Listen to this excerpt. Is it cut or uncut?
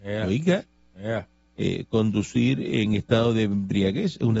cut